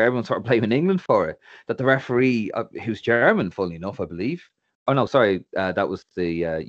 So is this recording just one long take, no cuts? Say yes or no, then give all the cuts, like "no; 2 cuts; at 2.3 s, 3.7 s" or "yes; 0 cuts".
yes; 0 cuts